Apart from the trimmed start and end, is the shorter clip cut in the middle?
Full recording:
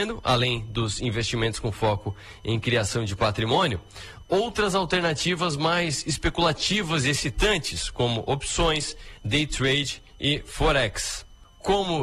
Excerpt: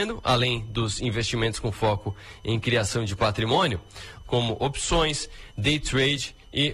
yes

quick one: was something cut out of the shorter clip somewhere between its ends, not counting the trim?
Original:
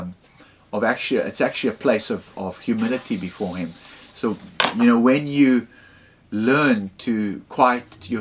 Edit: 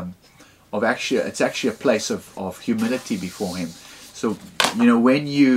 no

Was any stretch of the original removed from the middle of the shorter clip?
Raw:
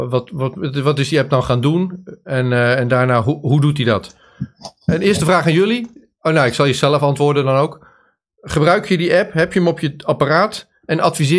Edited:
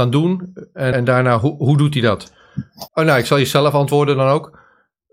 yes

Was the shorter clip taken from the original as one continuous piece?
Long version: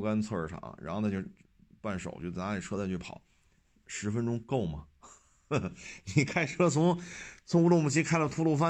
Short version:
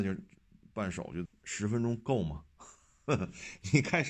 no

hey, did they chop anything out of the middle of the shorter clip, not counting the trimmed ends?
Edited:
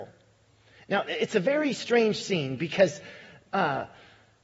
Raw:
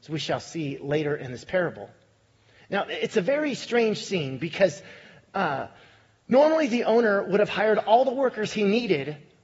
no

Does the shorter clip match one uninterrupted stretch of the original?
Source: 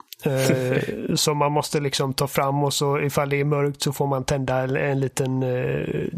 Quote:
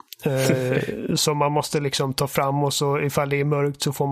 yes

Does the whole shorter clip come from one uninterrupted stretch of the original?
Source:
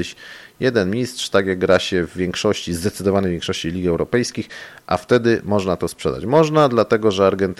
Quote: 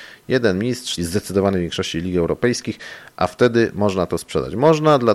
no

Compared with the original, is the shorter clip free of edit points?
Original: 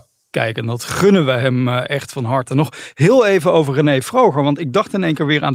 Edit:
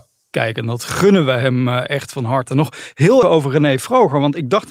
no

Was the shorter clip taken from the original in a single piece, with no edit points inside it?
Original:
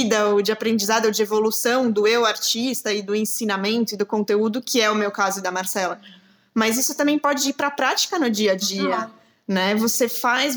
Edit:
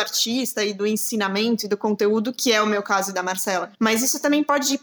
no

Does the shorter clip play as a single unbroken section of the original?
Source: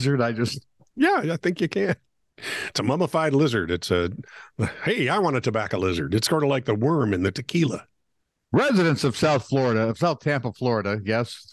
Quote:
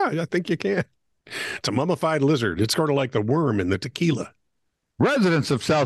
no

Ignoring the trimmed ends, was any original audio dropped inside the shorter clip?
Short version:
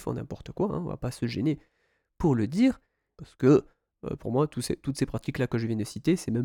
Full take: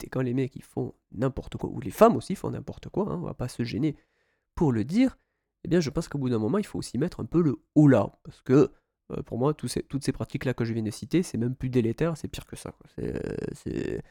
yes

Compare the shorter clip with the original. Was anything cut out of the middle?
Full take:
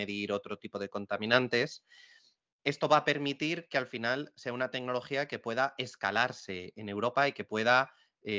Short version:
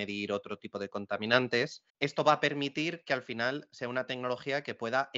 yes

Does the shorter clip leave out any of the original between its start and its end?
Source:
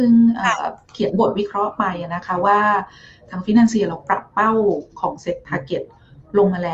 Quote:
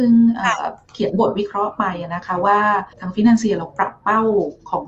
yes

